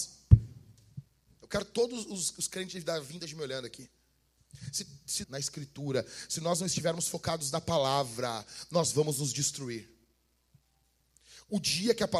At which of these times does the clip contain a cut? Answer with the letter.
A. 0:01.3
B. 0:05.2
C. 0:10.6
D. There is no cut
B